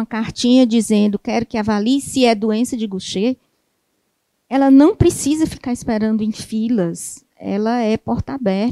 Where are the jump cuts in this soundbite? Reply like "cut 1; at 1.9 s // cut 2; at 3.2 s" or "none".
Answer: none